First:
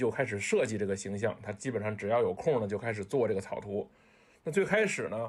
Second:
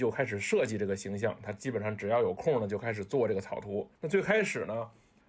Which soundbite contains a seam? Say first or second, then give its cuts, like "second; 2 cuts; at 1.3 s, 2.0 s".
second; 1 cut; at 4.0 s